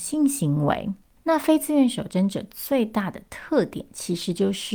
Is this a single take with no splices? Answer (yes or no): yes